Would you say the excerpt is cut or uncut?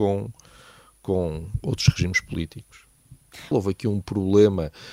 cut